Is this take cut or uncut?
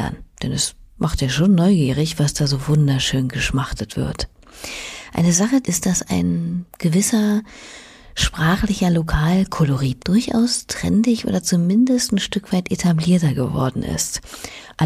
cut